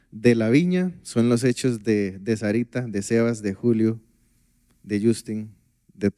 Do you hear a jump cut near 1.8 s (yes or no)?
no